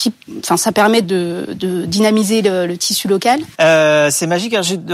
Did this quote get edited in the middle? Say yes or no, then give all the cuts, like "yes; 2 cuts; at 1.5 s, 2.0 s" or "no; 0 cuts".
yes; 2 cuts; at 1.0 s, 3.5 s